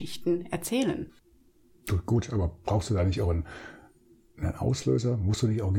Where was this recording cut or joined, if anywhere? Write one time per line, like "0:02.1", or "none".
none